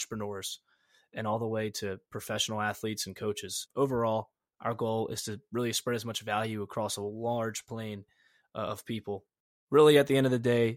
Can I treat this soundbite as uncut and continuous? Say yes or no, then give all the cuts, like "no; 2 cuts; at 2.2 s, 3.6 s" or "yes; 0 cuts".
yes; 0 cuts